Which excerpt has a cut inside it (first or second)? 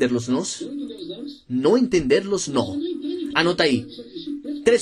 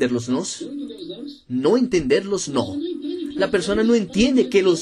first